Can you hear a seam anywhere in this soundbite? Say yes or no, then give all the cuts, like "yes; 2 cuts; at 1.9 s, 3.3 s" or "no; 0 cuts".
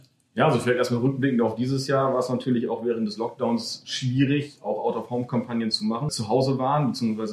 yes; 1 cut; at 6.1 s